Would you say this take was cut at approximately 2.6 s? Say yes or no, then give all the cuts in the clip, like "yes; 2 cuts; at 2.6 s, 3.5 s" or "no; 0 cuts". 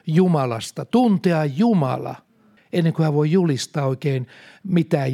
yes; 1 cut; at 2.6 s